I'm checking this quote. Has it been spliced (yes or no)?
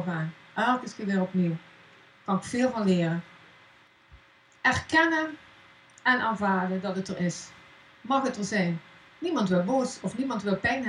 no